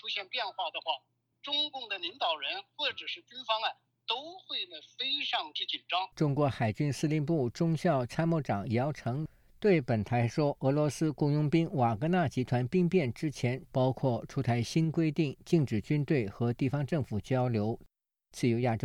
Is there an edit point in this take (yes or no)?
yes